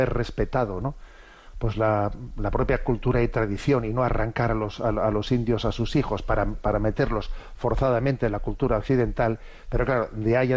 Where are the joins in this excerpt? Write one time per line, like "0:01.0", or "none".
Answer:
none